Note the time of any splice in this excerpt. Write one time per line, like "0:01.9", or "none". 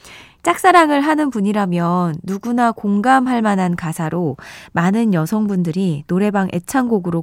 none